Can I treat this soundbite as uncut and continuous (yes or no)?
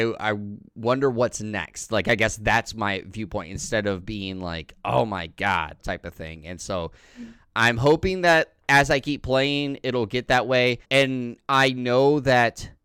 no